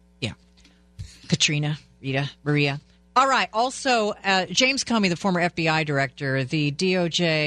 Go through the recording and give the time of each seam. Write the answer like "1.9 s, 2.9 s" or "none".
none

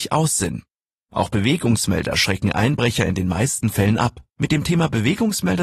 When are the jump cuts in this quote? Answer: 4.3 s

